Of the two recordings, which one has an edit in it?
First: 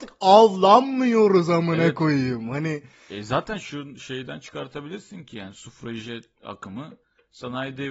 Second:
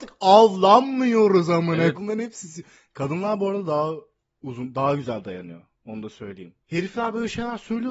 second; 2 cuts; at 1.9 s, 6.6 s

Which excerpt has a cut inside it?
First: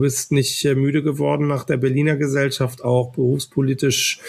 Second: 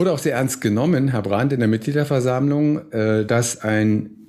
second; 1 cut; at 3.3 s

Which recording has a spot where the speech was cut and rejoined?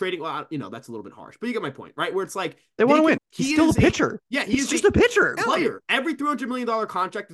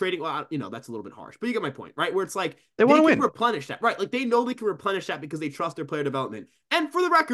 first; 2 cuts; at 3.2 s, 5.4 s

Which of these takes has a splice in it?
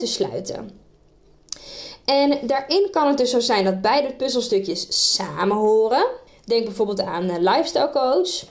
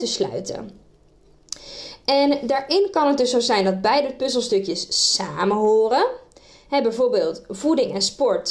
first; 1 cut; at 6.3 s

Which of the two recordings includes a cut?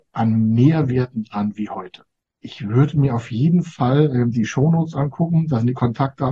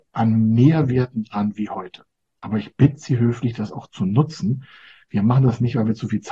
first; 1 cut; at 2.2 s

